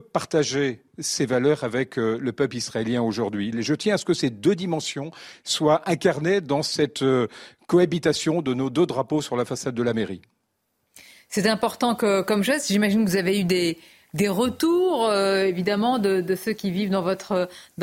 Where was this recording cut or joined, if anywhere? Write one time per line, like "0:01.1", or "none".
0:03.5